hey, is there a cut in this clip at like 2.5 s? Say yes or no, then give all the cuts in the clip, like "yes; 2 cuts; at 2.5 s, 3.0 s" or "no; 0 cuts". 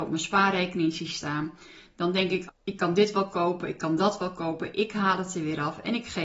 yes; 1 cut; at 2.5 s